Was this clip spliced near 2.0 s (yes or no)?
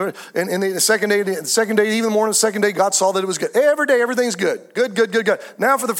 no